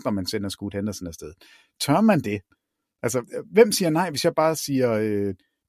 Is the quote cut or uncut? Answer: uncut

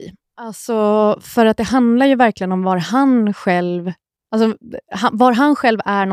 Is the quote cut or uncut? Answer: uncut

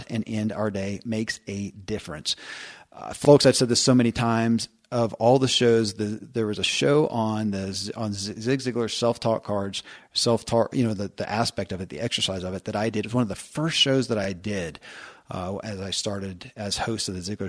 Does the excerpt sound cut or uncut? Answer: uncut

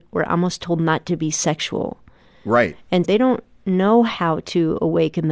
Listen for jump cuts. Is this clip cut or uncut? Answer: cut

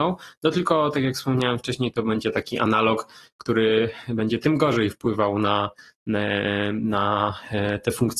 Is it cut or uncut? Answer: uncut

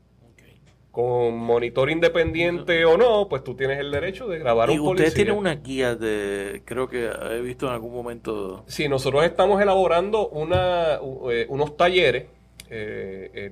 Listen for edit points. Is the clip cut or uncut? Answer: uncut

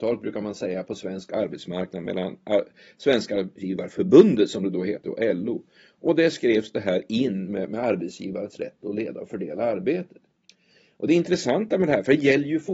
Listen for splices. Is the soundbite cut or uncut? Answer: uncut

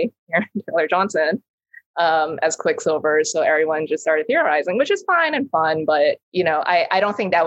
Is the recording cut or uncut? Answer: cut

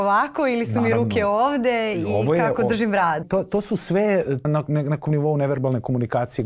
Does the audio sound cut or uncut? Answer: cut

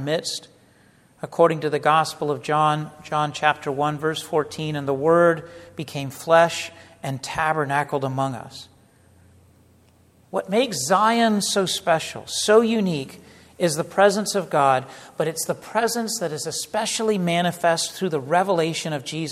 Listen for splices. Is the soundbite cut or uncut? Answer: uncut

